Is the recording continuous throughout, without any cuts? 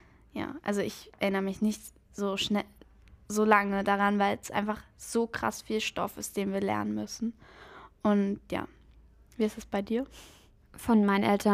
yes; 0 cuts

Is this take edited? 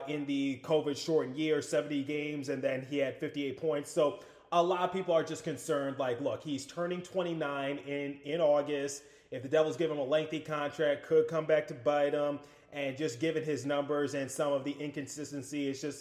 no; 0 cuts

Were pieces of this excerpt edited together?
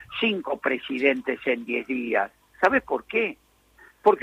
no; 0 cuts

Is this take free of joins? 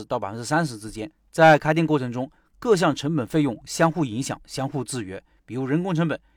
yes; 0 cuts

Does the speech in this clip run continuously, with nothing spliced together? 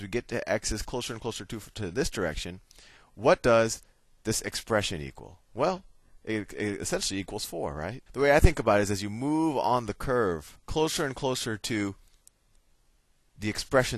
no; 2 cuts; at 8.1 s, 10.6 s

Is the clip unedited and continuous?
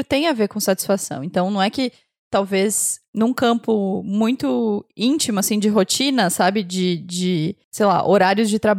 yes; 0 cuts

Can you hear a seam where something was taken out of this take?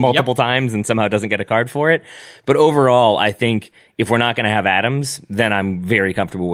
no; 0 cuts

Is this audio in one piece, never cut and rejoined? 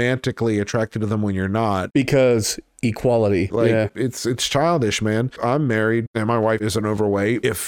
no; 1 cut; at 3.5 s

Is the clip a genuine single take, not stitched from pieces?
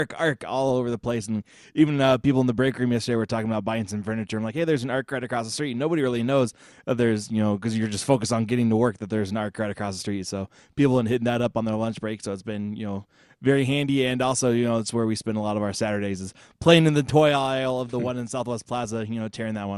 yes; 0 cuts

